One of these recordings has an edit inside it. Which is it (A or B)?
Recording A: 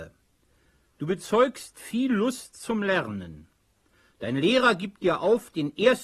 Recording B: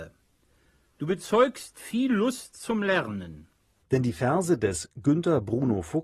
B